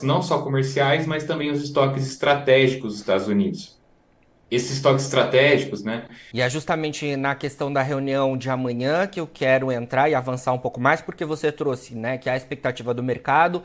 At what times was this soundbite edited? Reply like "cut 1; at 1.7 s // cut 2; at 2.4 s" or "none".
cut 1; at 6.3 s